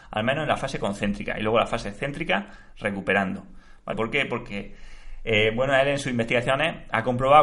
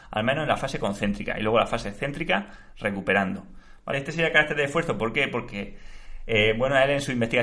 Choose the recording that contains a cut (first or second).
first